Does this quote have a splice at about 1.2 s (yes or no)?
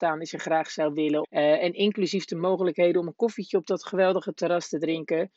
yes